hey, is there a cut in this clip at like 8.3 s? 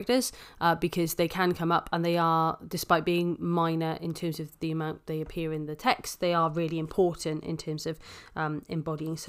no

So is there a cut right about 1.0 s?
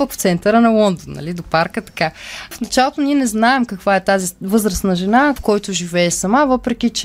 no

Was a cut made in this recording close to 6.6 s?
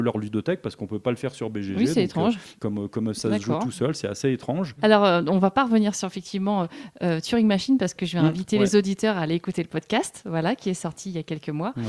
no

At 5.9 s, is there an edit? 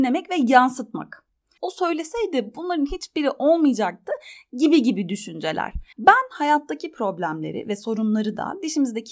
yes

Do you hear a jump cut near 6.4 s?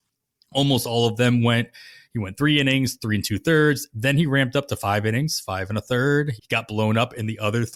yes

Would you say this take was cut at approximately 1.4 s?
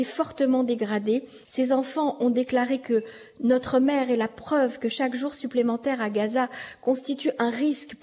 yes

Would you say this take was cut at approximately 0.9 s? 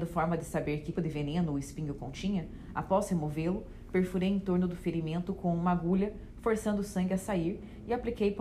yes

